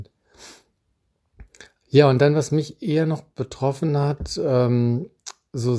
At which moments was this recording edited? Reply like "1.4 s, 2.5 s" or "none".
1.8 s